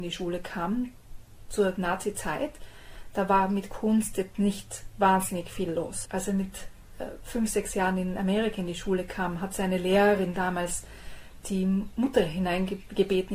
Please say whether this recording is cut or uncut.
cut